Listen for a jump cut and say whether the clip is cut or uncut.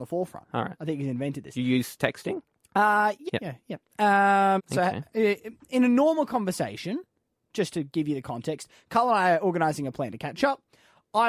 cut